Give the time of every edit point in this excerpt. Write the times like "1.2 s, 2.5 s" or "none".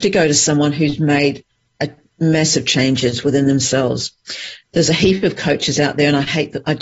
none